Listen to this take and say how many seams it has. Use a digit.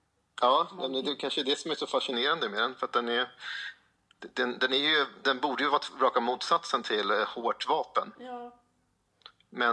0